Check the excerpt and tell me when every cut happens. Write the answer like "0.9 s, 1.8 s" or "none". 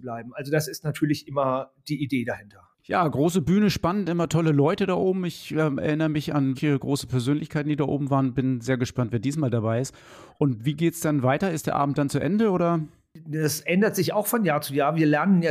6.5 s